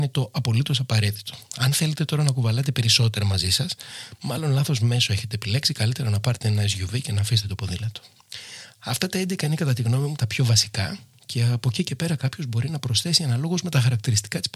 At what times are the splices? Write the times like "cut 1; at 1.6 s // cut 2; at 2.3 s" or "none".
none